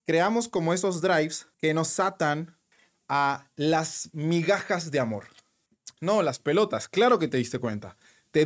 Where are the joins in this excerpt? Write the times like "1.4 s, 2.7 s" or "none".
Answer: 1.5 s, 6.0 s